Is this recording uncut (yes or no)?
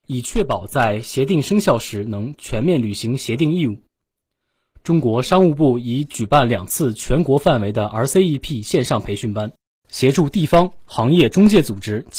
yes